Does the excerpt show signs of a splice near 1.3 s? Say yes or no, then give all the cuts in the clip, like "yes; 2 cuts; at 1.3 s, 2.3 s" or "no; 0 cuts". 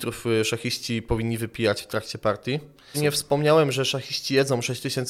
no; 1 cut; at 2.9 s